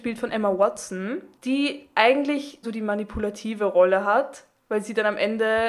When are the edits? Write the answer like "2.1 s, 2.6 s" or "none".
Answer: 2.6 s